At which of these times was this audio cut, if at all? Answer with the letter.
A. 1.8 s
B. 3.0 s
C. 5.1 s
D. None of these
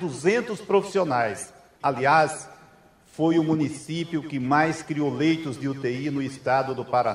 A